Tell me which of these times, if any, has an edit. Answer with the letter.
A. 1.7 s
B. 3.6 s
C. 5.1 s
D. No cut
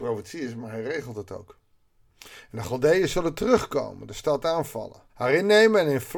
C